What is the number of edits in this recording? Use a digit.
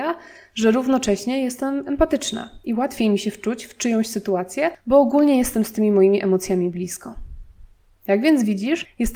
0